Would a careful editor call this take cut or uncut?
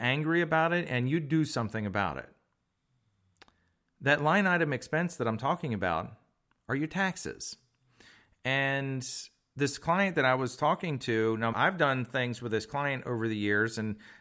cut